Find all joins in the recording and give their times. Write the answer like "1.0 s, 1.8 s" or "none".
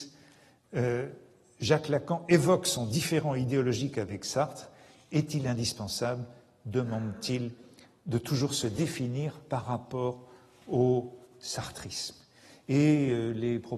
none